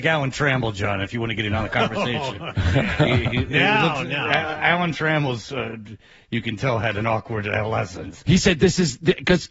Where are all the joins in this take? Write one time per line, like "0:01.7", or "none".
0:08.2